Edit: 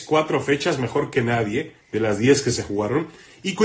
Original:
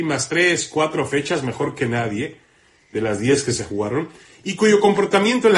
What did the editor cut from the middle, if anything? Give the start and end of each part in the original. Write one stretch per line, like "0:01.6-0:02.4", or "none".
0:02.5-0:02.8